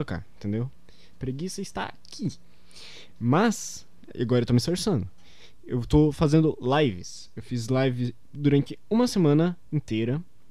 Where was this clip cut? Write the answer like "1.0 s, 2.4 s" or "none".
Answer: 1.1 s

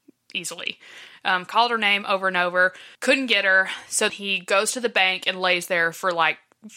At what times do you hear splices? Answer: 3.0 s, 4.1 s

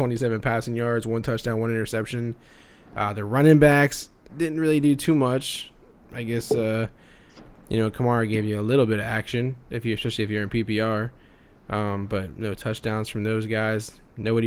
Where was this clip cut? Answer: 4.3 s

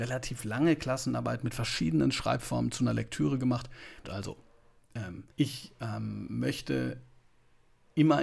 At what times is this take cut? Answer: 4.0 s, 5.3 s

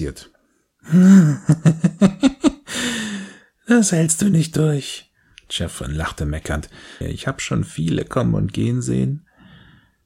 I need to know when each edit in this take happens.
7.0 s

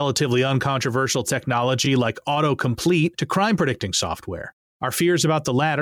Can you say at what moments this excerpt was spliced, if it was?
none

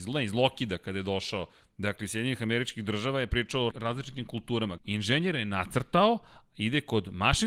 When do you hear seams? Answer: 3.7 s, 4.8 s

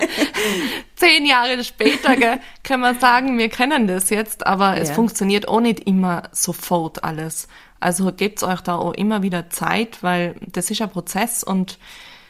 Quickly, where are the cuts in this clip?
none

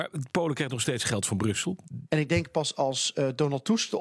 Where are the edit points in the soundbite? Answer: 2.1 s

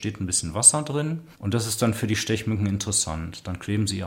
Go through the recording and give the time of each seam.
1.3 s

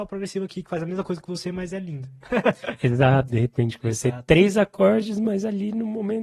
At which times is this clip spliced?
3.3 s

